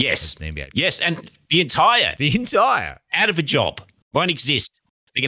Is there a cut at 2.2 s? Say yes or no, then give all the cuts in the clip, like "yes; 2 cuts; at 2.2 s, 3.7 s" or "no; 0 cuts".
yes; 1 cut; at 2.2 s